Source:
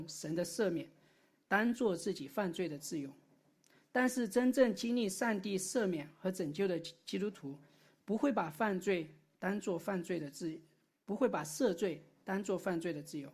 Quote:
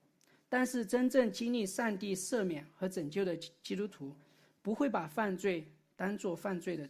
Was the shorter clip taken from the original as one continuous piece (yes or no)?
yes